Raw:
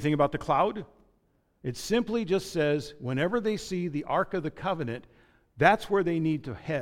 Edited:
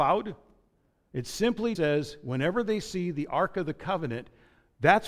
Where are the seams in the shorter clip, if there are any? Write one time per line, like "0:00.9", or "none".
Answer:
0:01.8